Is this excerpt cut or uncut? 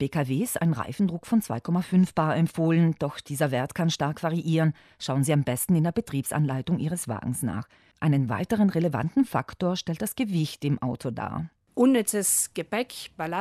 cut